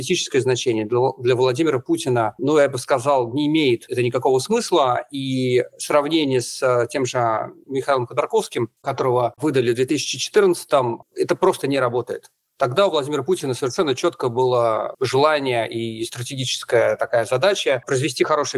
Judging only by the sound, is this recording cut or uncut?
uncut